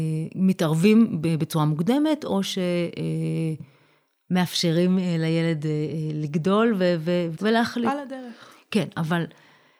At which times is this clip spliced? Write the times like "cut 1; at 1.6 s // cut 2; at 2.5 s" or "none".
cut 1; at 7.3 s

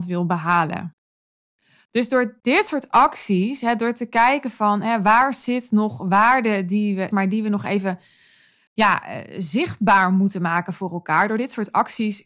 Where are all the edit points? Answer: cut 1; at 7.1 s

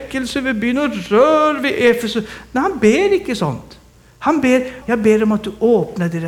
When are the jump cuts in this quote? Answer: cut 1; at 4.8 s

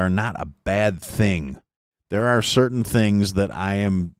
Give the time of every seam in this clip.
none

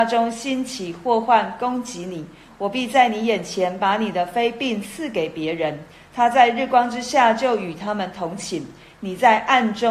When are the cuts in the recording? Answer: none

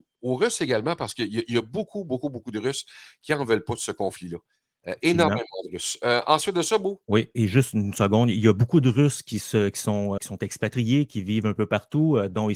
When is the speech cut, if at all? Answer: cut 1; at 10.2 s

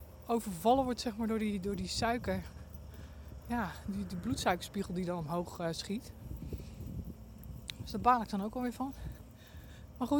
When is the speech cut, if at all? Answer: none

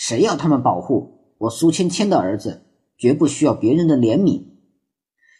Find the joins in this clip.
none

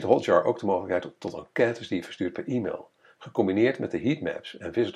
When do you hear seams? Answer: none

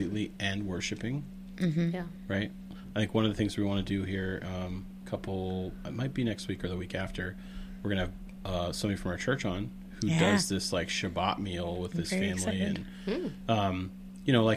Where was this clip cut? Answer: none

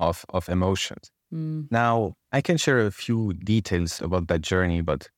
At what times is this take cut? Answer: cut 1; at 2.2 s // cut 2; at 4.0 s

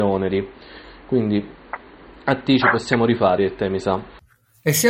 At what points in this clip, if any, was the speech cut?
none

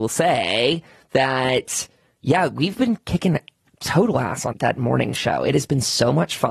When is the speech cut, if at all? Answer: cut 1; at 4.5 s

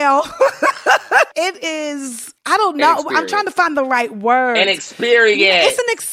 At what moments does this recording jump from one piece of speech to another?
none

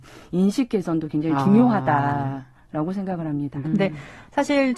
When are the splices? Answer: cut 1; at 3.6 s

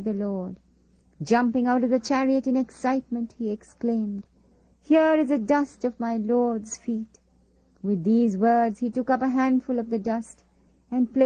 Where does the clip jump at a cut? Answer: none

